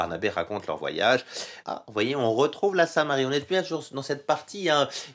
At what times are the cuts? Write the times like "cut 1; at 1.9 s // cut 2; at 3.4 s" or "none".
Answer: cut 1; at 1.6 s